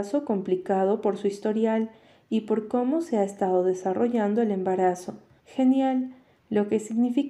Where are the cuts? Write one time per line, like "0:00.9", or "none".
0:05.4